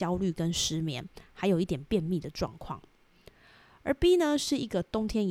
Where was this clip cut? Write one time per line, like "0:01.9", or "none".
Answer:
none